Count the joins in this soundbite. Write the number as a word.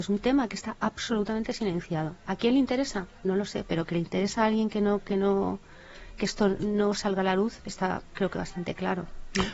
zero